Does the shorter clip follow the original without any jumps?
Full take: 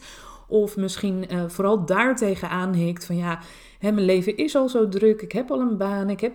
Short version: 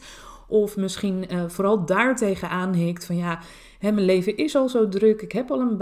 yes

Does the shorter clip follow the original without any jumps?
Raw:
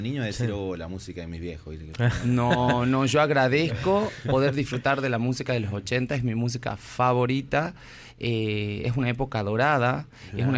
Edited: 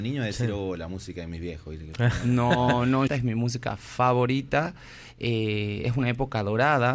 no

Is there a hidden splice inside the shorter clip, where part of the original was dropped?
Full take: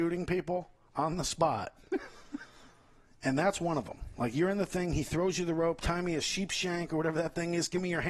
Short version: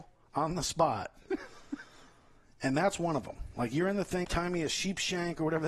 yes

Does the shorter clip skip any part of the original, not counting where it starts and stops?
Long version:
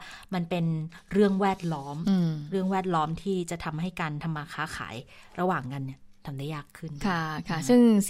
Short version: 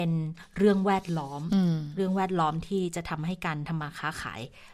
no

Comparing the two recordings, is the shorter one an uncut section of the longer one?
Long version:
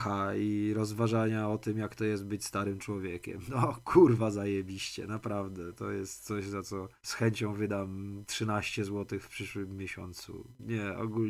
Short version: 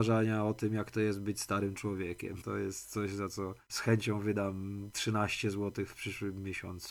no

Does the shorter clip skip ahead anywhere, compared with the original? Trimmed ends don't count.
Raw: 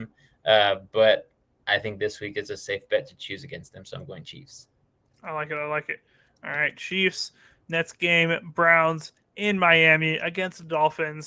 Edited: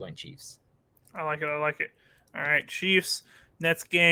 no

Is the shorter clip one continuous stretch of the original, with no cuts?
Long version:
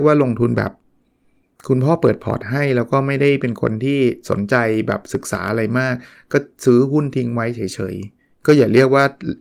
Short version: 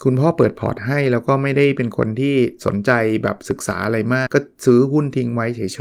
no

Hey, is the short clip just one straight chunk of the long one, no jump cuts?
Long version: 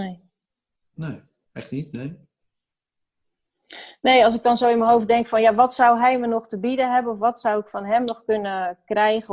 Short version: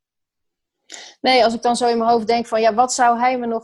yes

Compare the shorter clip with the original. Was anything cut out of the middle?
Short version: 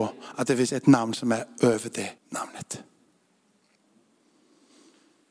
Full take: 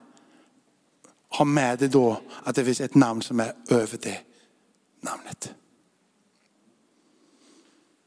yes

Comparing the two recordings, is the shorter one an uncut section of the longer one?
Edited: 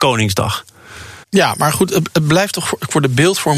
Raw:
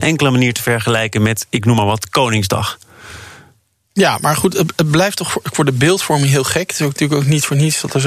no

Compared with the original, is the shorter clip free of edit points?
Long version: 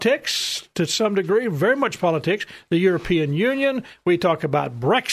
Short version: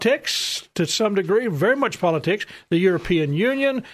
yes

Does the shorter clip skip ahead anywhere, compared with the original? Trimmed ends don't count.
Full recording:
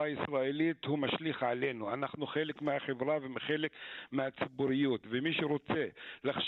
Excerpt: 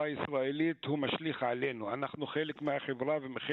no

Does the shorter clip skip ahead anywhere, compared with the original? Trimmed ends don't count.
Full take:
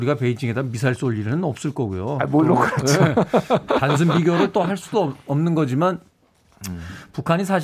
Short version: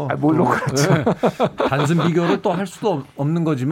no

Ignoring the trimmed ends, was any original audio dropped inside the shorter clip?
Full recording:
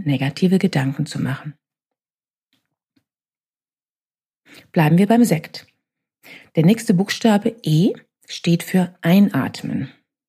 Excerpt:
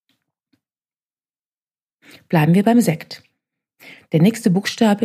no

